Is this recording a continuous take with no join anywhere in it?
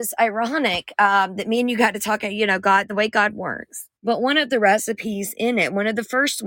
no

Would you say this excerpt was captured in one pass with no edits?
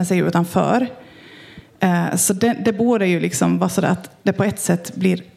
yes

